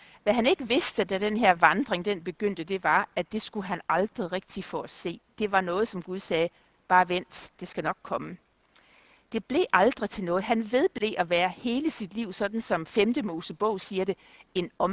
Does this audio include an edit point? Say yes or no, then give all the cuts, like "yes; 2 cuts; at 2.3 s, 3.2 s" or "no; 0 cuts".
no; 0 cuts